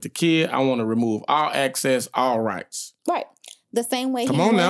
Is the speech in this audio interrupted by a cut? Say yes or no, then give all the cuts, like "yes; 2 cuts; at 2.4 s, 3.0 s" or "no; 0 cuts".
yes; 1 cut; at 3.0 s